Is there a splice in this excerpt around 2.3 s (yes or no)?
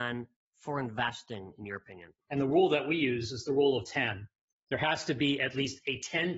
yes